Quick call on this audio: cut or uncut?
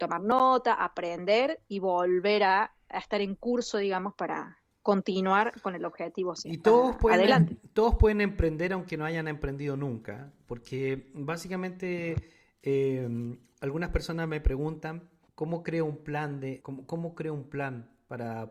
cut